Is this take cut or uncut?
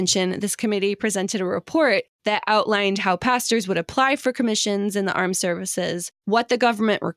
uncut